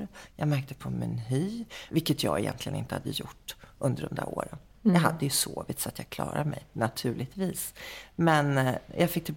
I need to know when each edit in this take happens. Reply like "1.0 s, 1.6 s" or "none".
1.9 s